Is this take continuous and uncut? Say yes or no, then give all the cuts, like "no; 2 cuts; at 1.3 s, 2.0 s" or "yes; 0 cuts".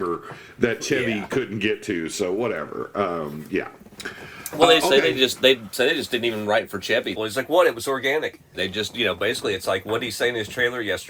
no; 2 cuts; at 7.2 s, 8.5 s